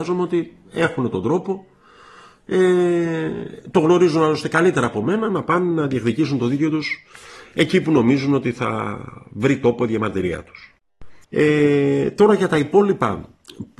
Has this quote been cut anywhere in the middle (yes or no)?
yes